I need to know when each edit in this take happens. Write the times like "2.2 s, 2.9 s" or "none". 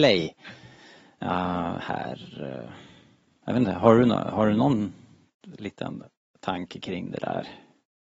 none